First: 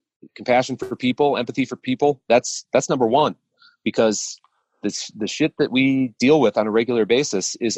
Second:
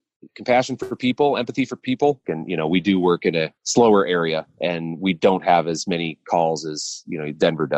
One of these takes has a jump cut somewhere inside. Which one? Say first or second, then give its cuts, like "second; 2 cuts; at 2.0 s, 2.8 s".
second; 2 cuts; at 2.2 s, 3.6 s